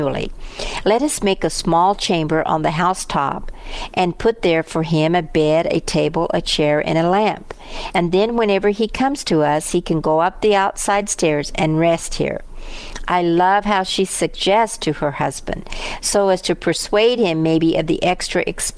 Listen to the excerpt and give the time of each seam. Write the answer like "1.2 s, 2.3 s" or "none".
none